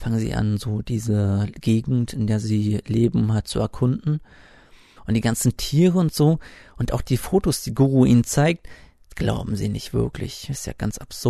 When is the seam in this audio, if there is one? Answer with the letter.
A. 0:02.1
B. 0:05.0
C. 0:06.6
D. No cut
B